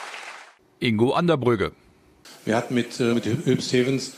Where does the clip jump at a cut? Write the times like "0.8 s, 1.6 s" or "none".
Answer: 3.1 s